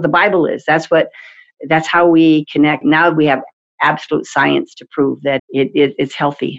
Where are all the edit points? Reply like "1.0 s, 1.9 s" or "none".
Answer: 2.8 s, 5.4 s

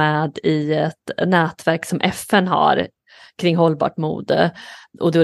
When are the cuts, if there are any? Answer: none

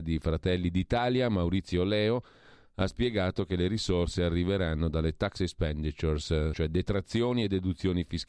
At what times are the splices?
6.5 s

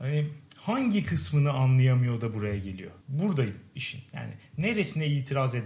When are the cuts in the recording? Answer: 3.0 s

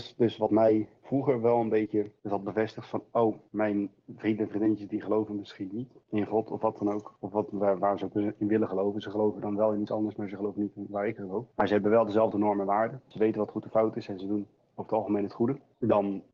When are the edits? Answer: none

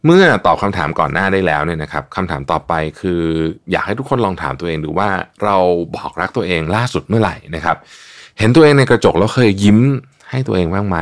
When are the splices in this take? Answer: none

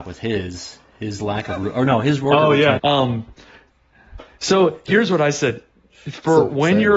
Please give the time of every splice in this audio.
2.8 s

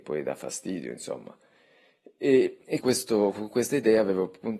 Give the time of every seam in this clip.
2.8 s

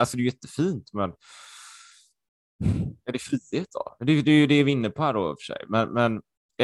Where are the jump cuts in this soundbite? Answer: none

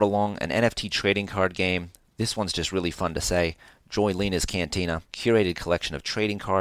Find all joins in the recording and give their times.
5.1 s

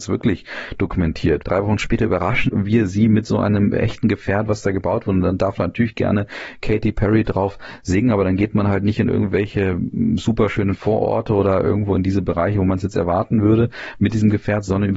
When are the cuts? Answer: 1.4 s

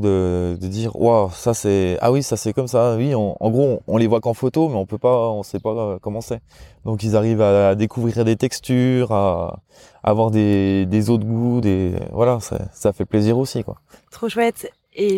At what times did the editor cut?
none

